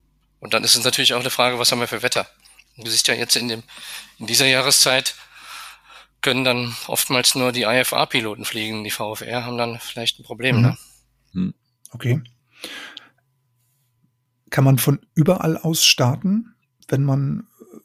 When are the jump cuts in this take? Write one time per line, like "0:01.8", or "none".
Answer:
none